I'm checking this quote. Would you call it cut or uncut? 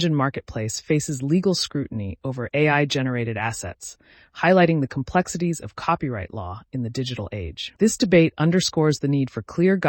uncut